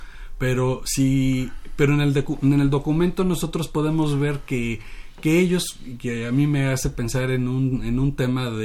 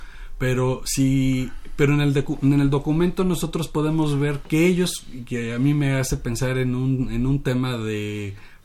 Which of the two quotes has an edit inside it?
second; 1 cut; at 4.4 s

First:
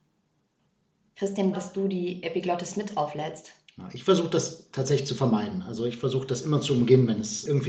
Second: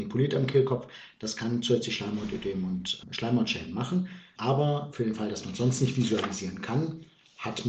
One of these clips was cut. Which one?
first; 1 cut; at 1.5 s

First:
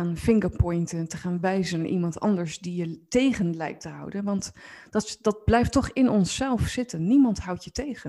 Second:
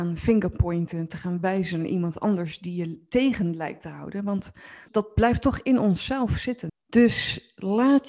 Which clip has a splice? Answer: second; 2 cuts; at 4.9 s, 6.7 s

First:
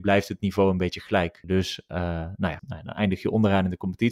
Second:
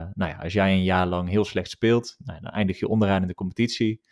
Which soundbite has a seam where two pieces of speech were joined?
first; 2 cuts; at 1.4 s, 2.6 s

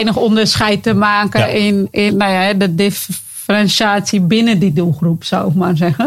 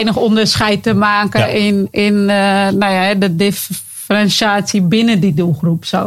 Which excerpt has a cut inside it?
first; 1 cut; at 2.1 s

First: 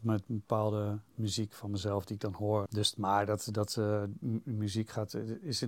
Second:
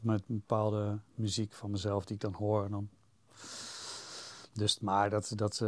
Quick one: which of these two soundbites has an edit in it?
first; 1 cut; at 2.7 s

